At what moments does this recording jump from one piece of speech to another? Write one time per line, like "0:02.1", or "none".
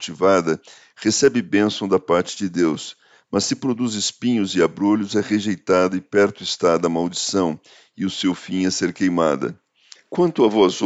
0:10.0